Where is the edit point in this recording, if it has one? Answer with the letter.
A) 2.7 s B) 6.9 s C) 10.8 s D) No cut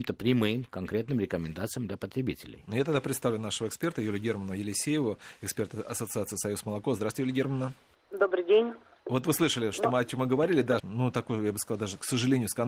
C